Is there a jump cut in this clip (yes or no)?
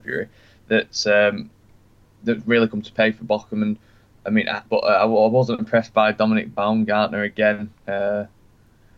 yes